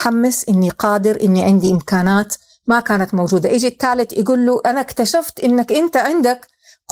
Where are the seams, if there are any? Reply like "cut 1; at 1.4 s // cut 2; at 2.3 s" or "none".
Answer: none